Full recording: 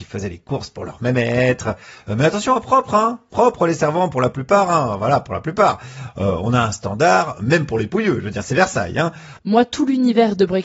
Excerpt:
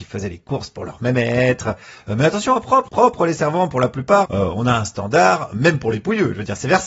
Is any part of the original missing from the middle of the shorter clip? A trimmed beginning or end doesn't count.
yes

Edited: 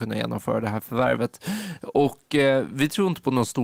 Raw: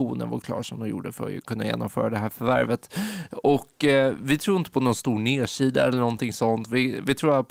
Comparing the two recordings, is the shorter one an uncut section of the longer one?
yes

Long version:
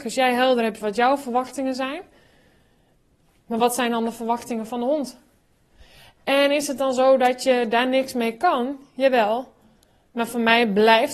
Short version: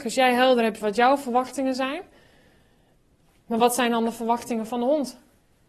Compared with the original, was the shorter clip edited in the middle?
no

